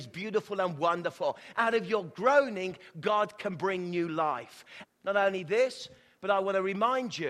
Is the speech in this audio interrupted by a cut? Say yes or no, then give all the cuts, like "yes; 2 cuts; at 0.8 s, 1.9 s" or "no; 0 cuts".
yes; 2 cuts; at 1.5 s, 4.8 s